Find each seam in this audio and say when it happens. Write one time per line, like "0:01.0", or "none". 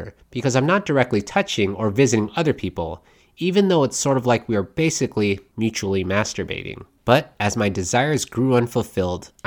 0:05.5
0:07.0